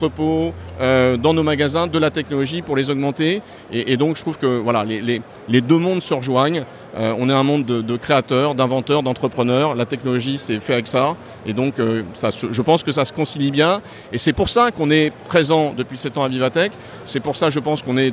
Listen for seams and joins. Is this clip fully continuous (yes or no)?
yes